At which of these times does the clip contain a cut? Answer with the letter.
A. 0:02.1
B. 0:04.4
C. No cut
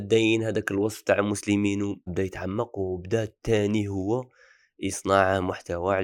A